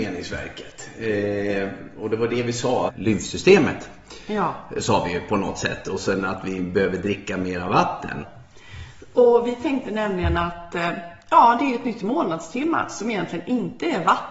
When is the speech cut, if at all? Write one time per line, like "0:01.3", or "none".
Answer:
0:02.9
0:08.2